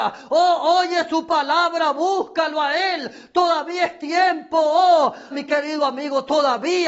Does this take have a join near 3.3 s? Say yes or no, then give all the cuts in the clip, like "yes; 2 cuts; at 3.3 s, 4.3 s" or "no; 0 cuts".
no; 1 cut; at 5.3 s